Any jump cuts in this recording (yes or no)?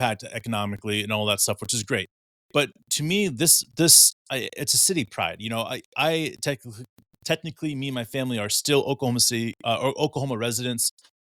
no